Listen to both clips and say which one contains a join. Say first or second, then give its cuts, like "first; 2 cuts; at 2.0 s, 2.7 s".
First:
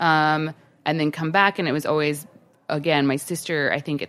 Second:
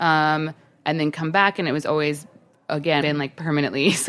second; 1 cut; at 3.0 s